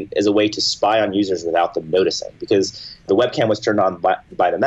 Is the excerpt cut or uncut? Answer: uncut